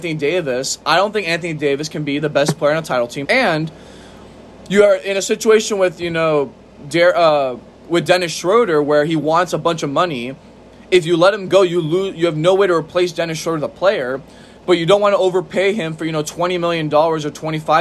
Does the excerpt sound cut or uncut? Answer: cut